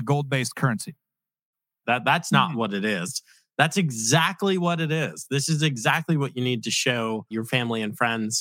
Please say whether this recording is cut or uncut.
cut